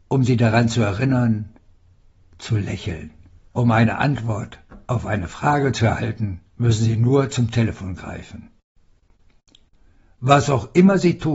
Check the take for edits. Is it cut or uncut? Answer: cut